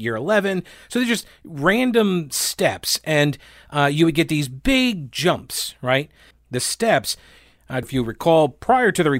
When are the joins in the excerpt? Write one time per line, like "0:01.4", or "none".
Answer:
0:06.3
0:07.8